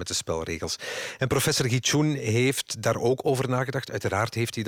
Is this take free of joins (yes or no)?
yes